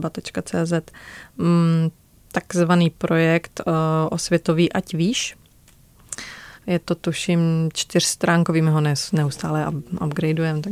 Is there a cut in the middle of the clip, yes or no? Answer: yes